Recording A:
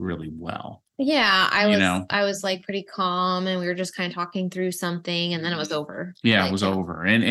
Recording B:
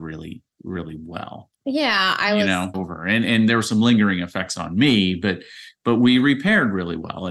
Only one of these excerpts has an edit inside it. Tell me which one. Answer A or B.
B